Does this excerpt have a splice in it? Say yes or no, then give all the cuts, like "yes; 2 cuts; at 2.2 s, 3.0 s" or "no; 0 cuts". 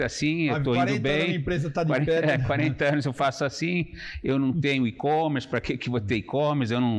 no; 0 cuts